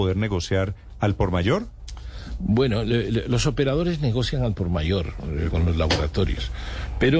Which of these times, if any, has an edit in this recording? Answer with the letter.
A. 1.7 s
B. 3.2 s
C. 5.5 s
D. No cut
C